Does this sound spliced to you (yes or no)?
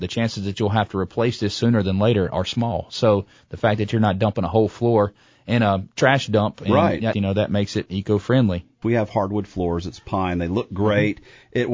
yes